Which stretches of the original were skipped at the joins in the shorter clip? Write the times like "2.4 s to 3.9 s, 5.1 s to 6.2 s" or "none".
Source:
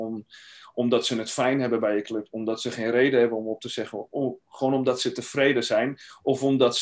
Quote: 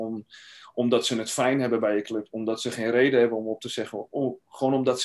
none